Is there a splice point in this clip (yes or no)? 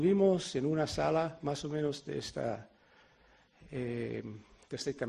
no